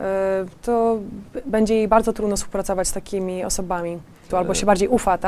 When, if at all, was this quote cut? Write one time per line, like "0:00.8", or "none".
0:04.3